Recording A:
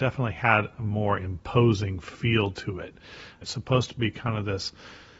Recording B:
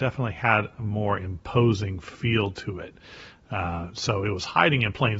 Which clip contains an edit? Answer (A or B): A